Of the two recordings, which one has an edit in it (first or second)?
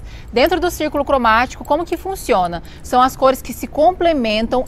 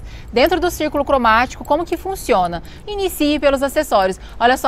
second